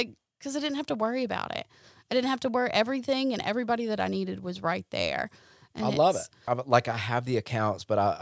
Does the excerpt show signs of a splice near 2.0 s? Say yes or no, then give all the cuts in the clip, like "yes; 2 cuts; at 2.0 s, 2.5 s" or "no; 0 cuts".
no; 1 cut; at 6.5 s